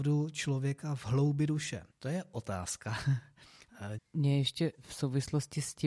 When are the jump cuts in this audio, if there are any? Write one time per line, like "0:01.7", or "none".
0:01.9
0:04.0